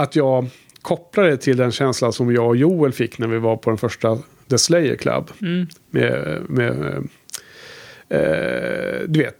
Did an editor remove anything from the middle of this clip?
no; 0 cuts

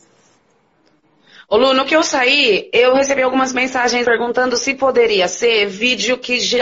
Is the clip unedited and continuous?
no; 1 cut; at 4.0 s

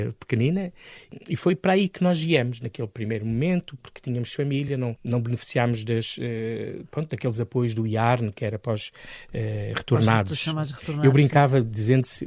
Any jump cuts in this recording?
no; 0 cuts

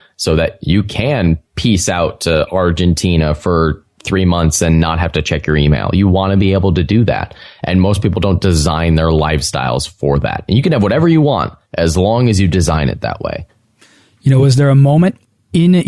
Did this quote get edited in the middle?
no; 0 cuts

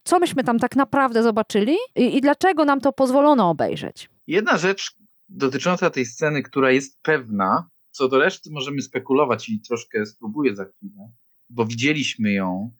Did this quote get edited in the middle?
yes; 2 cuts; at 4.2 s, 11.3 s

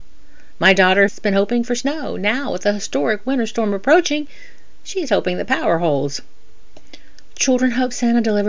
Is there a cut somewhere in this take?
yes; 1 cut; at 1.1 s

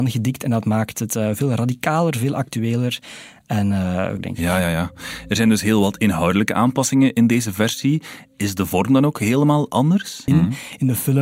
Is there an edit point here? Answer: yes; 2 cuts; at 4.2 s, 10.3 s

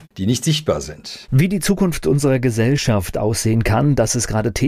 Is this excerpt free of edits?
no; 1 cut; at 1.3 s

